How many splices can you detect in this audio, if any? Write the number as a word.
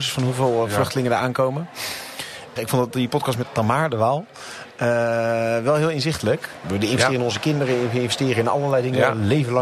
two